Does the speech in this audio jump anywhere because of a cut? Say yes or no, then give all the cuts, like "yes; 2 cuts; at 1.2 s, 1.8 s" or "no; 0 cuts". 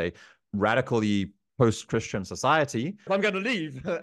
yes; 1 cut; at 3.1 s